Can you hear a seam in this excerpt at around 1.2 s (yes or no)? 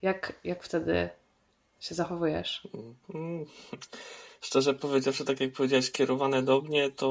no